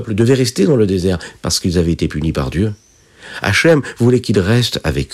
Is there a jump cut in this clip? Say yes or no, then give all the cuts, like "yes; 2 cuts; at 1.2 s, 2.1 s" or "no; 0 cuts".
no; 0 cuts